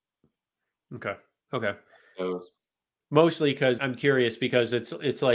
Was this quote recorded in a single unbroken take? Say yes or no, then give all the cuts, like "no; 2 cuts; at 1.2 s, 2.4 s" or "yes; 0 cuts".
no; 1 cut; at 3.8 s